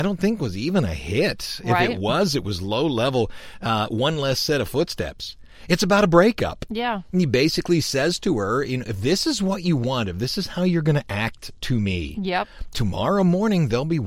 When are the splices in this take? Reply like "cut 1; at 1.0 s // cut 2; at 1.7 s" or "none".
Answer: none

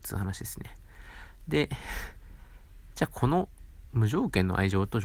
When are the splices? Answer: none

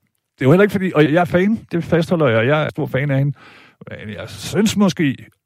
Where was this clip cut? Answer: cut 1; at 1.1 s // cut 2; at 2.7 s

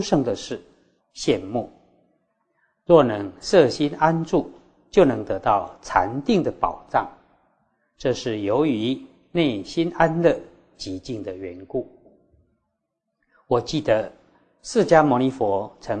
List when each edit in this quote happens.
cut 1; at 1.0 s

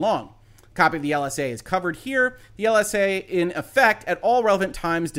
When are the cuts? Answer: none

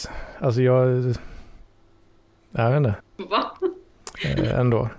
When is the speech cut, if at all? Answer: cut 1; at 3.0 s

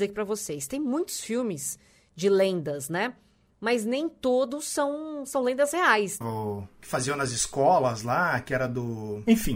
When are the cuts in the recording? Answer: cut 1; at 6.2 s

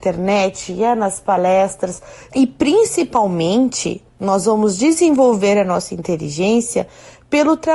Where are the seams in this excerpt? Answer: cut 1; at 2.3 s

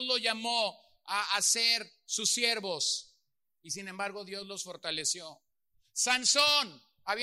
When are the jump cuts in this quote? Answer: none

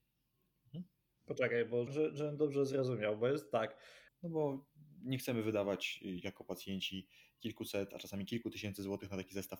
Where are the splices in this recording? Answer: cut 1; at 1.9 s // cut 2; at 4.1 s

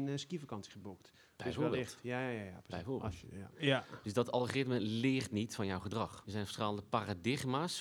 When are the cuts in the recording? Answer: cut 1; at 3.5 s // cut 2; at 6.3 s

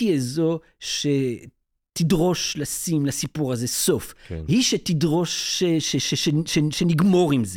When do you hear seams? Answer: none

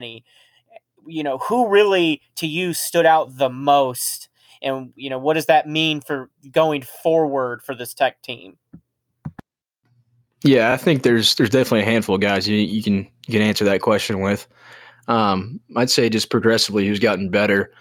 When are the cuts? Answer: none

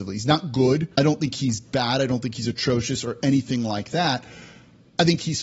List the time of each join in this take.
cut 1; at 0.9 s

